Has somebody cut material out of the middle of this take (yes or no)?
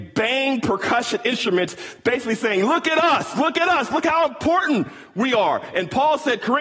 no